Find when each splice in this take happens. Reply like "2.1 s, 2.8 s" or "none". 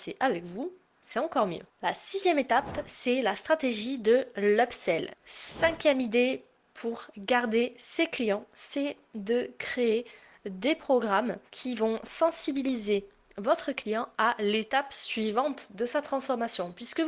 5.1 s, 11.5 s